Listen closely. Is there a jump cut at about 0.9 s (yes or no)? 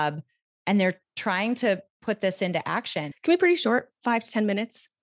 no